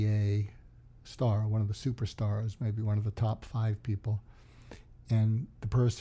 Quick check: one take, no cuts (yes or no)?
yes